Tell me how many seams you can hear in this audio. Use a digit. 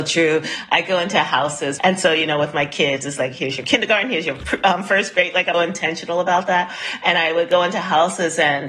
2